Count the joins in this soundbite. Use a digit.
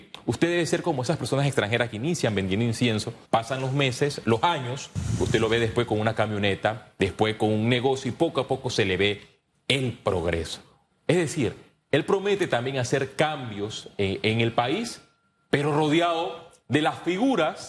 1